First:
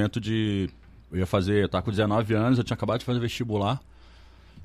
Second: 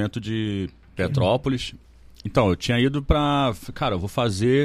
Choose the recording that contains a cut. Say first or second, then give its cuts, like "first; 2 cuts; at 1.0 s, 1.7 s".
second; 1 cut; at 1.0 s